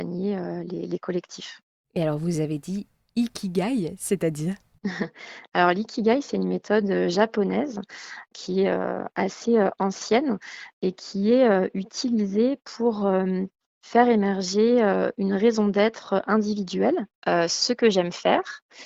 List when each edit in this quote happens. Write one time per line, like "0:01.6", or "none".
0:17.1